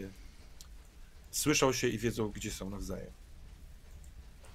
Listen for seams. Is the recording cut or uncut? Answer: cut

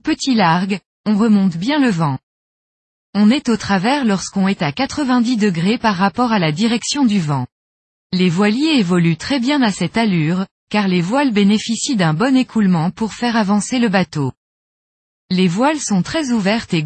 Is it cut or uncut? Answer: cut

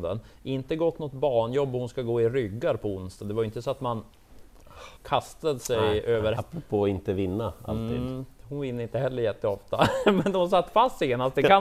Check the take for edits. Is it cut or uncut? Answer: cut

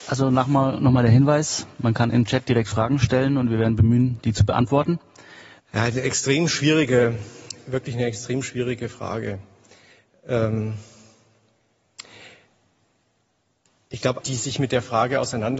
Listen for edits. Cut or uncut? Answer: cut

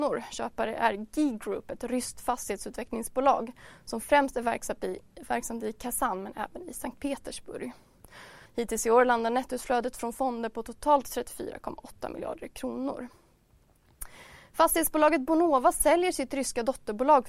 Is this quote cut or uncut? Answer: cut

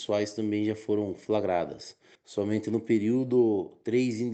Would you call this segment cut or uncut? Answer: uncut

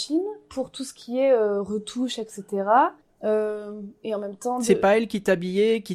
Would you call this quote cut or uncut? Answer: cut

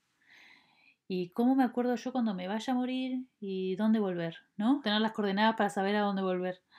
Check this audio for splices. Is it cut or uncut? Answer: cut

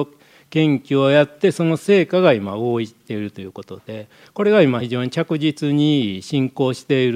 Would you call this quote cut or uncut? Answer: uncut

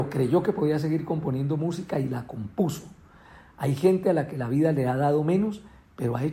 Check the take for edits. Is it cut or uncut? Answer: uncut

